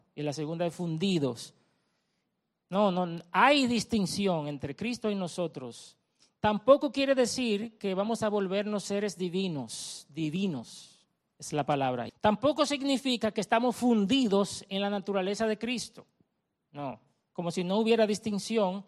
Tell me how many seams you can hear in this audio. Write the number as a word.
one